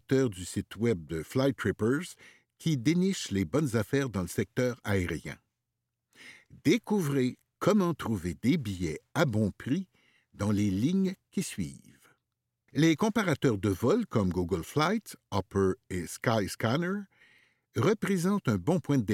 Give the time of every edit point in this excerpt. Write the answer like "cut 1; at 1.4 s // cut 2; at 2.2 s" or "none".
cut 1; at 12.7 s